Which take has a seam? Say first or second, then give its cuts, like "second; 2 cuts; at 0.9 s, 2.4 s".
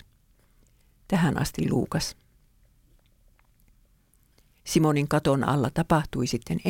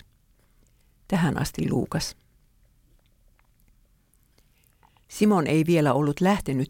first; 1 cut; at 4.6 s